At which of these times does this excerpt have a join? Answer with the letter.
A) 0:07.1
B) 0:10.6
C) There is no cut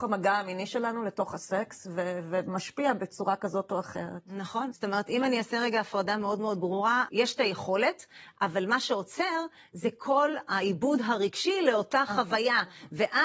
A